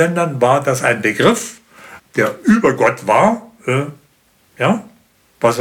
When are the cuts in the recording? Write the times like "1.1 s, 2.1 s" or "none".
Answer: 2.0 s